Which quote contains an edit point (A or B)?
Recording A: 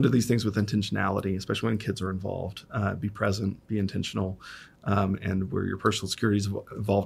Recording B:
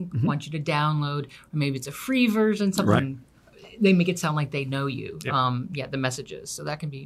B